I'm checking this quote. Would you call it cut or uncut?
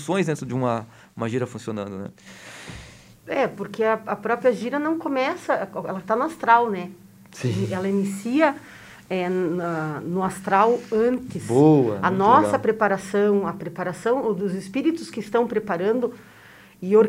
uncut